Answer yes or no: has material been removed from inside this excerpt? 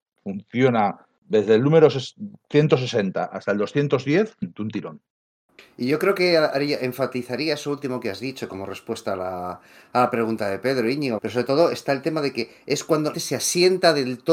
yes